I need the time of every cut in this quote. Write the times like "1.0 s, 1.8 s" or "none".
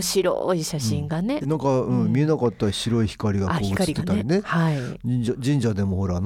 1.4 s